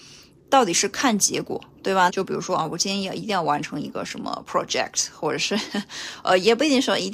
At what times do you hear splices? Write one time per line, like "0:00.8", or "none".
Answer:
0:02.1